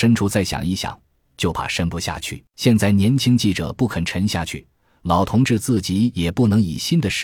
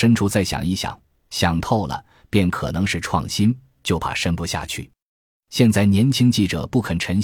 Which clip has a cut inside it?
first; 2 cuts; at 1.2 s, 2.5 s

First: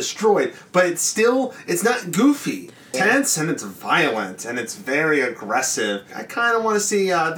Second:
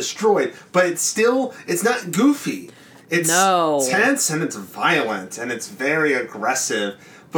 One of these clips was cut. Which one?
first; 2 cuts; at 2.9 s, 6.1 s

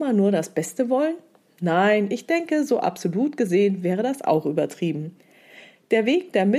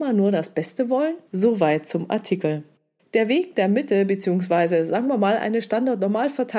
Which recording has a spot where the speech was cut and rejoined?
second; 2 cuts; at 1.3 s, 3.0 s

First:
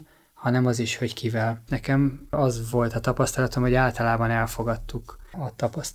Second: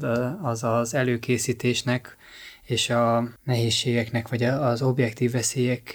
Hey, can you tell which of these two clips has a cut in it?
first; 1 cut; at 1.7 s

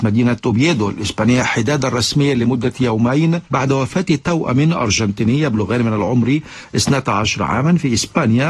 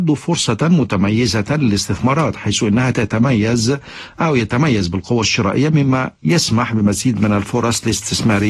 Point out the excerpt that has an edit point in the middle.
first; 1 cut; at 3.5 s

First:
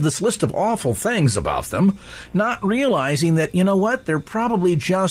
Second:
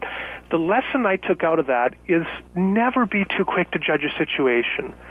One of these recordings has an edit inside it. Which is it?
second; 1 cut; at 2.5 s

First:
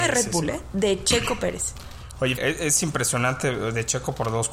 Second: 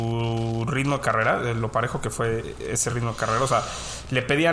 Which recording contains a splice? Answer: first; 1 cut; at 2.4 s

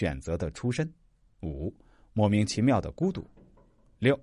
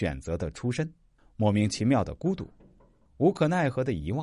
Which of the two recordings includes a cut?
second; 2 cuts; at 1.2 s, 3.1 s

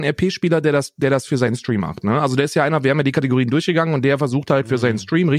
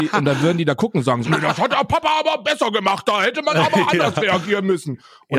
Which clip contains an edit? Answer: second; 1 cut; at 1.2 s

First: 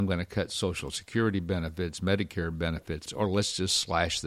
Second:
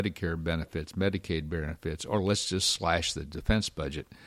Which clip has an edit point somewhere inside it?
first; 1 cut; at 3.1 s

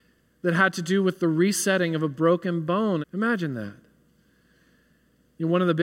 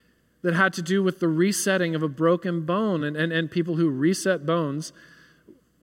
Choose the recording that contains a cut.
first; 1 cut; at 3.0 s

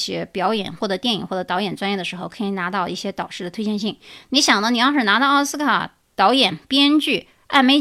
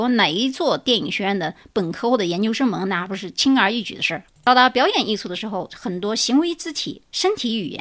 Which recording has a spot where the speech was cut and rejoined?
second; 1 cut; at 4.3 s

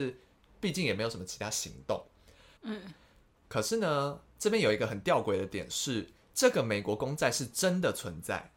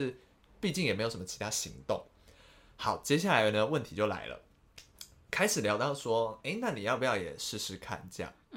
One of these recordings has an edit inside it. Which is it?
first; 1 cut; at 2.6 s

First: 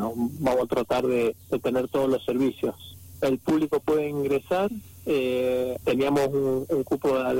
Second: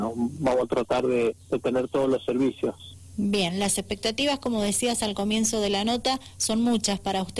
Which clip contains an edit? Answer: first; 2 cuts; at 3.2 s, 5.8 s

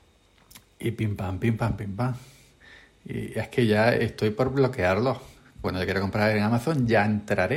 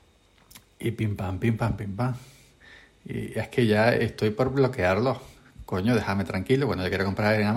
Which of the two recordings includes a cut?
first; 1 cut; at 5.6 s

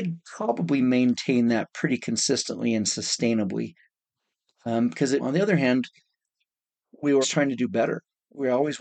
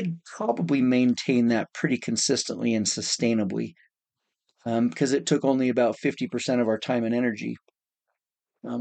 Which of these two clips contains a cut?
first; 2 cuts; at 5.2 s, 7.2 s

